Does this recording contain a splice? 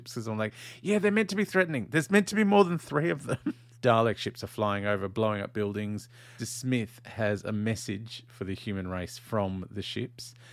yes; 2 cuts; at 3.7 s, 6.4 s

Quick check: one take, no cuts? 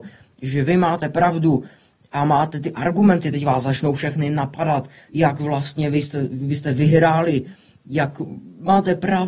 yes; 0 cuts

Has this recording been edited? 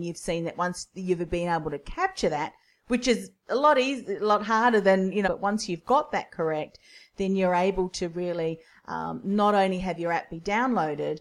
yes; 1 cut; at 5.2 s

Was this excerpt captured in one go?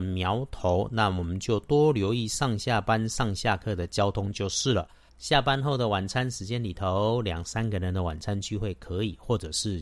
no; 1 cut; at 5.1 s

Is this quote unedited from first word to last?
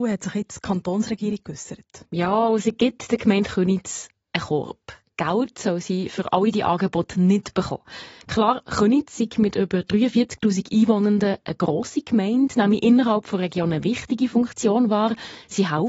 yes; 0 cuts

